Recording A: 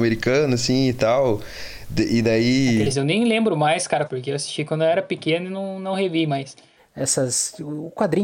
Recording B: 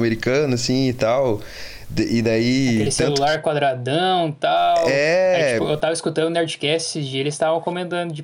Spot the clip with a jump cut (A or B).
A